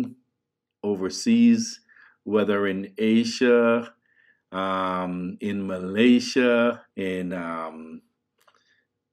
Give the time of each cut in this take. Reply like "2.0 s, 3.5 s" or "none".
6.9 s